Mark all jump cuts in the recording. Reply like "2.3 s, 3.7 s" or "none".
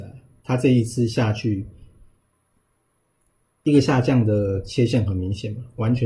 none